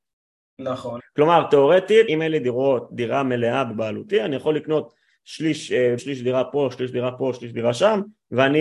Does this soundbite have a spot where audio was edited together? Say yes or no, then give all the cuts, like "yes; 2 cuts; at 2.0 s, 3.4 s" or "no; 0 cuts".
yes; 3 cuts; at 1.0 s, 2.1 s, 6.0 s